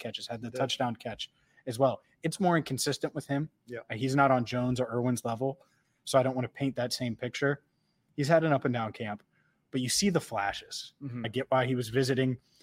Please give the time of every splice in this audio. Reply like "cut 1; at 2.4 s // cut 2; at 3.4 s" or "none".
cut 1; at 11.2 s